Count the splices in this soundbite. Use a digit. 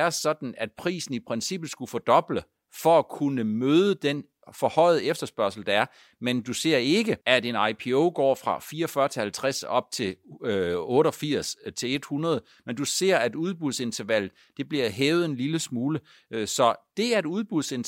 1